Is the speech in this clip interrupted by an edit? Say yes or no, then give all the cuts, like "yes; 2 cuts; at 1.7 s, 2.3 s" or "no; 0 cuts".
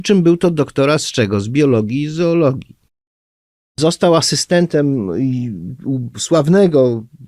no; 0 cuts